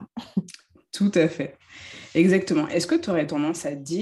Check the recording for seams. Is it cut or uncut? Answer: uncut